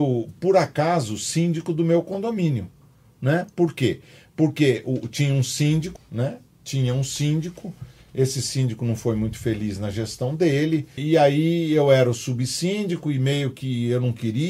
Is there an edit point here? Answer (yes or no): yes